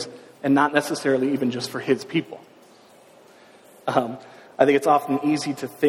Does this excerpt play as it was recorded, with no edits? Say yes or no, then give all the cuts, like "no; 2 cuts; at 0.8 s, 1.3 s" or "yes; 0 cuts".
no; 1 cut; at 3.8 s